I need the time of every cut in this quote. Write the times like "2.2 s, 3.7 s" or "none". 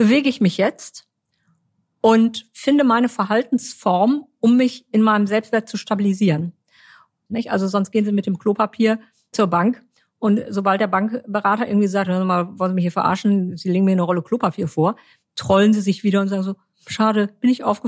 7.3 s, 16.7 s